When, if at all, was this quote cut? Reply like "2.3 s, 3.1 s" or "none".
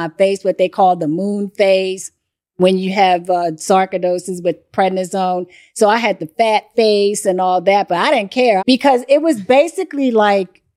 8.6 s